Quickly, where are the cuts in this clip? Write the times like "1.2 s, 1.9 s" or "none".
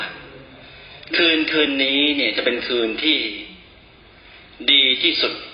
none